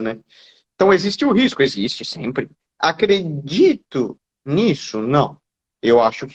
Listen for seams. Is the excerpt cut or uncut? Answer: cut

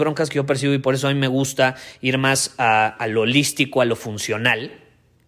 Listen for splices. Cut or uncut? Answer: uncut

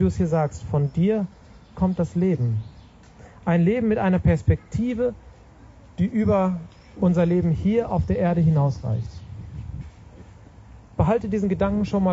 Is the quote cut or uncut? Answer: uncut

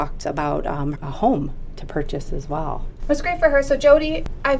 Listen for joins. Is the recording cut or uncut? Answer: cut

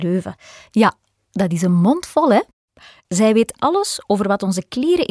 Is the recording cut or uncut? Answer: uncut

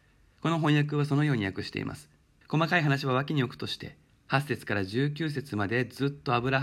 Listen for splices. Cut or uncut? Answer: cut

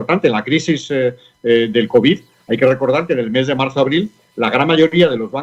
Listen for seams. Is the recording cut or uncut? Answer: uncut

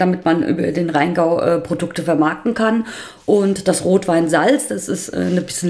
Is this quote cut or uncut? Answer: uncut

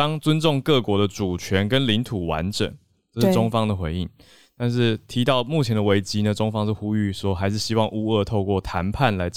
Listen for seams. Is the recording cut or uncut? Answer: uncut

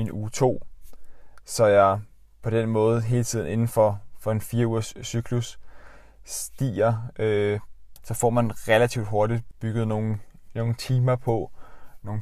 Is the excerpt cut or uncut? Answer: cut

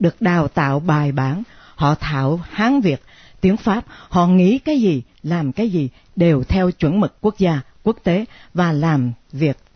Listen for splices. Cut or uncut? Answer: uncut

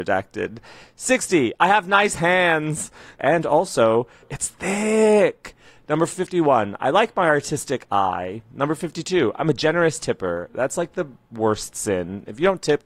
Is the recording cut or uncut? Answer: cut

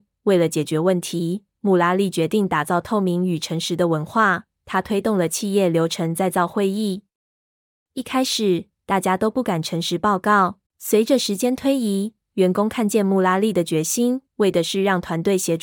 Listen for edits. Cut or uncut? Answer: cut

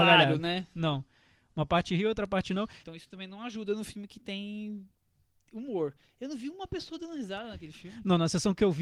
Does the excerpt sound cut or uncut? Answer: cut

